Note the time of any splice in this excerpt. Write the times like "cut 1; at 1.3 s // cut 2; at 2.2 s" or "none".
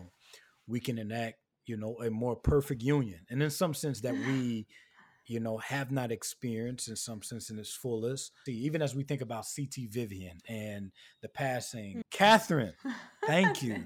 cut 1; at 8.5 s // cut 2; at 12.0 s

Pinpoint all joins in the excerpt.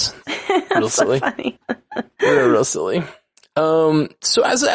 cut 1; at 1.6 s

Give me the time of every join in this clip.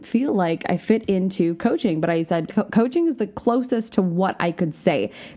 cut 1; at 2.5 s

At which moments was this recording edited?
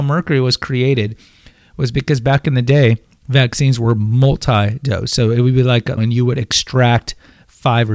cut 1; at 6.0 s

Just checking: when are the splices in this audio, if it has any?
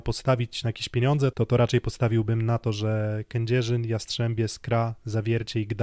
cut 1; at 1.3 s

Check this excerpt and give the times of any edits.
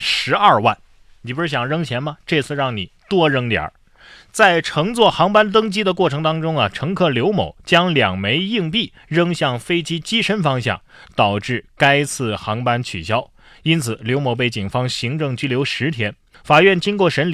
cut 1; at 16.3 s

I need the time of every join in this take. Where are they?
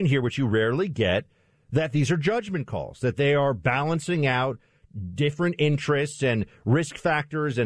none

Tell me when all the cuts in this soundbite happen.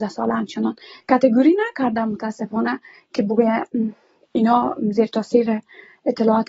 none

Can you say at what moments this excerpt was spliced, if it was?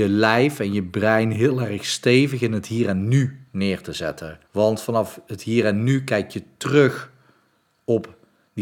cut 1; at 4.4 s

